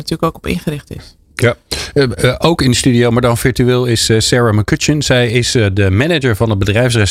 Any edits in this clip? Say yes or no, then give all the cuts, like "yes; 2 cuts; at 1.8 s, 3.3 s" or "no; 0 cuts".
no; 0 cuts